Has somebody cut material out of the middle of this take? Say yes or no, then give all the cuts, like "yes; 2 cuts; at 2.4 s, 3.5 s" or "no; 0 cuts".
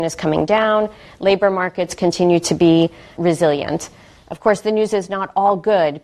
yes; 1 cut; at 3.2 s